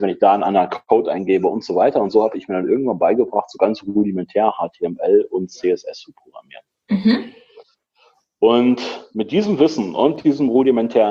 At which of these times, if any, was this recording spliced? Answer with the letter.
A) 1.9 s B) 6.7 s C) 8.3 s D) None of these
D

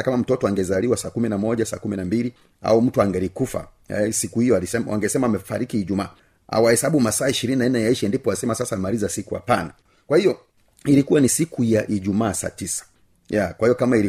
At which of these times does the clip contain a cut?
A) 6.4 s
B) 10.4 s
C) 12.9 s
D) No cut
D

